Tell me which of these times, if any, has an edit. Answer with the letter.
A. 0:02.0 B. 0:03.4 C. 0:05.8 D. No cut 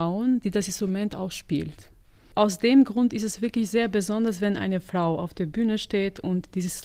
D